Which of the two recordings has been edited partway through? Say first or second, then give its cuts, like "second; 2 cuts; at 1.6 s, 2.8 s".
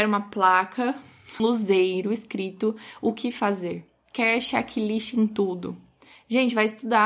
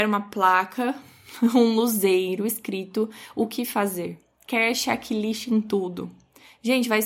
first; 1 cut; at 1.4 s